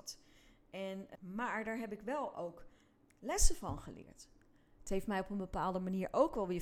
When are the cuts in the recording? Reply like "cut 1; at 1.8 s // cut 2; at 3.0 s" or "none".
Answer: cut 1; at 1.1 s // cut 2; at 3.0 s